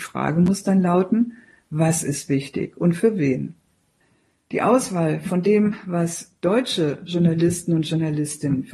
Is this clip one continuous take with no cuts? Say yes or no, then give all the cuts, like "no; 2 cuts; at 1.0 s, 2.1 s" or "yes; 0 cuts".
yes; 0 cuts